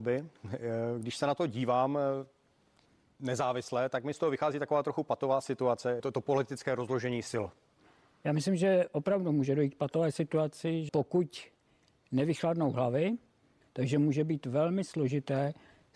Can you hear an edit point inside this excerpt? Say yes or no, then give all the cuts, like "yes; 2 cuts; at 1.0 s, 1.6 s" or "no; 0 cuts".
yes; 3 cuts; at 6.0 s, 10.9 s, 13.6 s